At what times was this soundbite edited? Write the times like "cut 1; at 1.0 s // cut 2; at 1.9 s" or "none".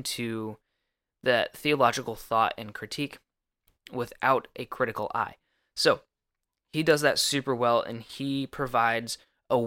none

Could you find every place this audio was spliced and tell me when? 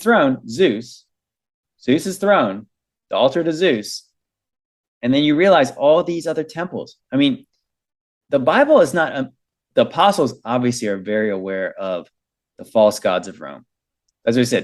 cut 1; at 9.7 s

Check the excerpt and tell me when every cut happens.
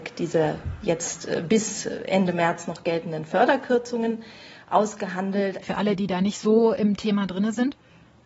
cut 1; at 5.6 s

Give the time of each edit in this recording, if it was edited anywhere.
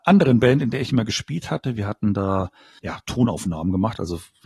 cut 1; at 2.8 s

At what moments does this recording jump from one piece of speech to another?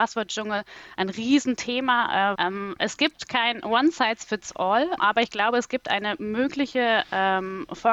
cut 1; at 2.3 s // cut 2; at 5.0 s

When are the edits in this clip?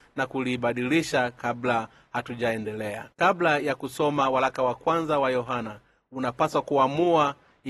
cut 1; at 3.1 s

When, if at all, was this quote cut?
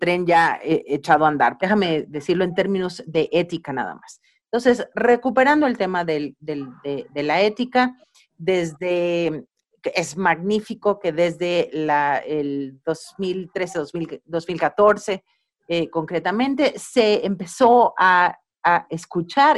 cut 1; at 1.6 s

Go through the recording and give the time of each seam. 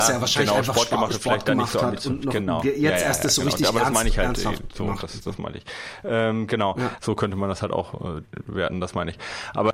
cut 1; at 7.0 s

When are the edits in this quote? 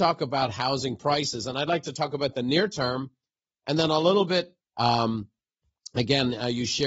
cut 1; at 4.6 s

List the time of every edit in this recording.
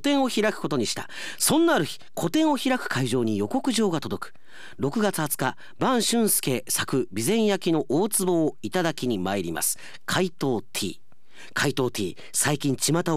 none

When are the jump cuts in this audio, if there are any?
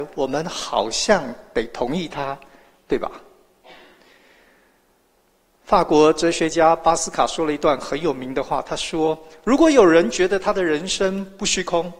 none

